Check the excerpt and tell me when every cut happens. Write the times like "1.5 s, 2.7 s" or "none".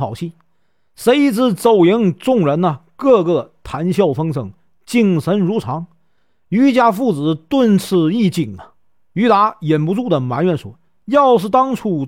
none